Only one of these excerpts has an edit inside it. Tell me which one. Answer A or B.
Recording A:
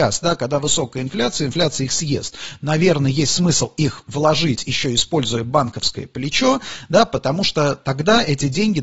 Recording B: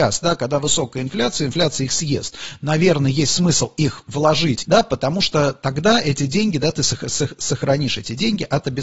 B